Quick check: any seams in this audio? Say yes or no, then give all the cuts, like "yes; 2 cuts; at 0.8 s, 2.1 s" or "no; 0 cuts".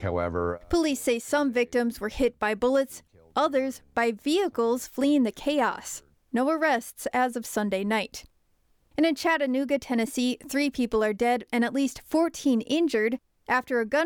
yes; 1 cut; at 6.1 s